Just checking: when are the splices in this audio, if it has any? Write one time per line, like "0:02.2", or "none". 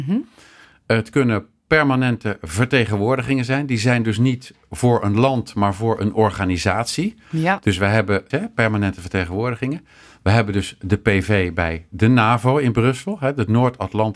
0:08.3